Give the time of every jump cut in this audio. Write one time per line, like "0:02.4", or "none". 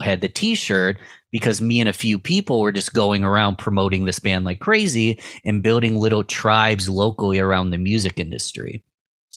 none